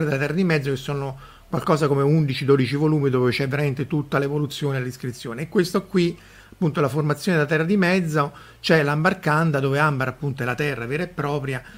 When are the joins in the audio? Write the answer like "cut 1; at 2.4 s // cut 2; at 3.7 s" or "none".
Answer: none